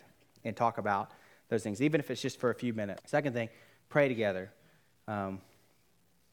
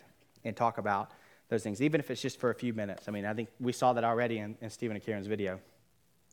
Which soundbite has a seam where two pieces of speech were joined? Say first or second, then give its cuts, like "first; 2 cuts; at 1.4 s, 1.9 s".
first; 1 cut; at 3.0 s